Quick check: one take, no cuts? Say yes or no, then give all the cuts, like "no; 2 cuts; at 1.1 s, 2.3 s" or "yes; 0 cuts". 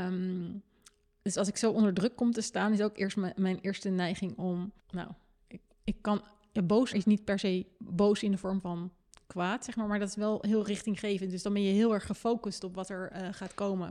no; 2 cuts; at 4.8 s, 6.9 s